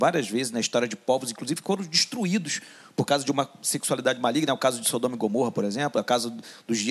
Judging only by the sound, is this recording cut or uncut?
uncut